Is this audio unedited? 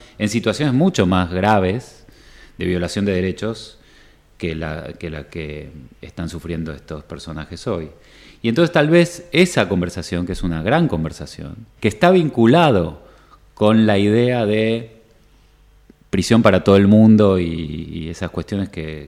no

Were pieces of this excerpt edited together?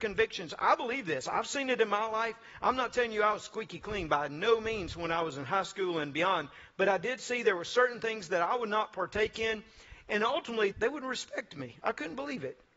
yes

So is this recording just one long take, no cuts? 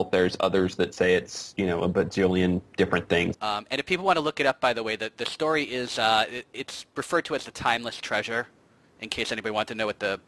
no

